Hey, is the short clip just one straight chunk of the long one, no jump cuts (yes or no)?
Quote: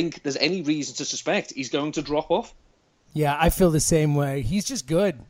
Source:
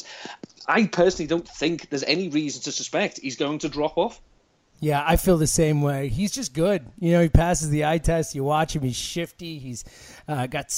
yes